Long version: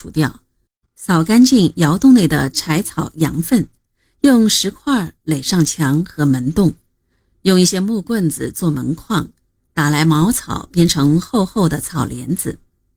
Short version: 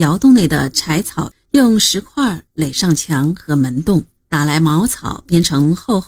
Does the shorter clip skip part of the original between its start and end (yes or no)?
yes